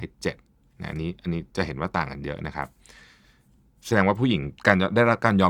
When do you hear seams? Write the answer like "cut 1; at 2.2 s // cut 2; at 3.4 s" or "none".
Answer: cut 1; at 4.6 s